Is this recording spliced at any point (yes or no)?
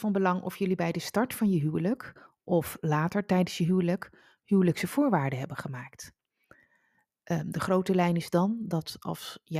no